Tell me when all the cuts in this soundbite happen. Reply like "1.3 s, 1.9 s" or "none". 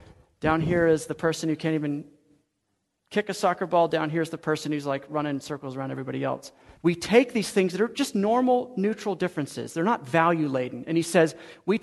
6.8 s

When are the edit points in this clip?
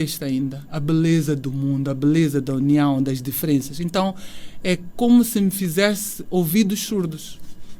none

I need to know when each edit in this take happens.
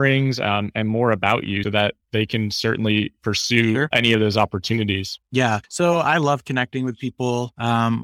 1.6 s

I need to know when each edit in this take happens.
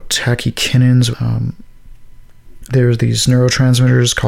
1.1 s, 2.7 s

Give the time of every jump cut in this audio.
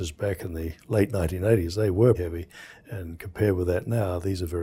2.1 s

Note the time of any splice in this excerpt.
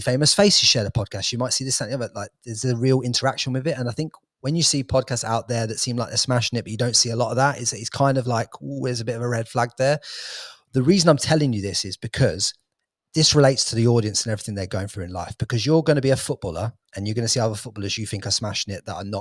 none

